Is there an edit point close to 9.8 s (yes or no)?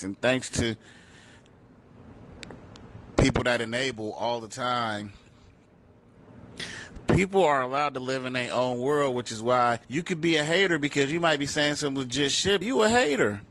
yes